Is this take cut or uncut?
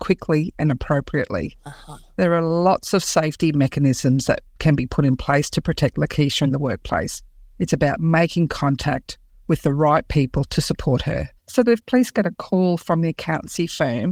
cut